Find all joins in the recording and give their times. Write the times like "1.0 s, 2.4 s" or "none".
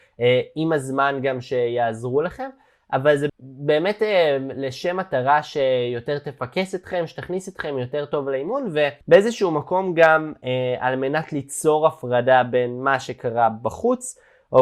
3.3 s, 9.0 s